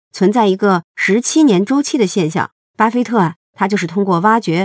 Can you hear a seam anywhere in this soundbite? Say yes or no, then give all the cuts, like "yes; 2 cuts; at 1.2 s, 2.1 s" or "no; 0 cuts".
yes; 1 cut; at 2.7 s